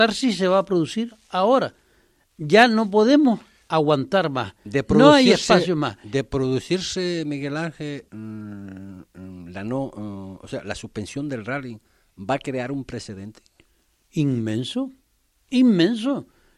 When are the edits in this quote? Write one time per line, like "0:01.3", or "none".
0:08.1